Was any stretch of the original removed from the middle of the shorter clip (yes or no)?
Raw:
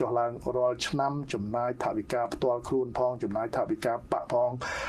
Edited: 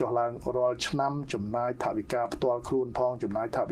no